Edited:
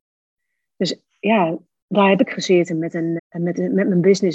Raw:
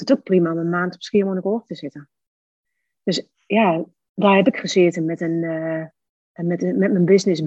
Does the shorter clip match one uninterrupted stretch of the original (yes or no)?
no